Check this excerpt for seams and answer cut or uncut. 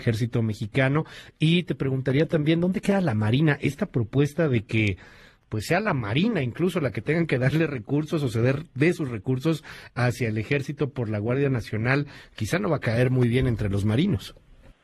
uncut